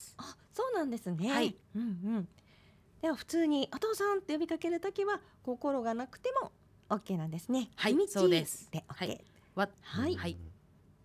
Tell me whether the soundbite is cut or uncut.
cut